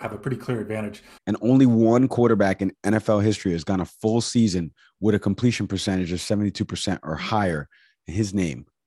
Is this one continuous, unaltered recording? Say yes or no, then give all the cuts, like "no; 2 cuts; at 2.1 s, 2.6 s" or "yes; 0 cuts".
no; 1 cut; at 1.2 s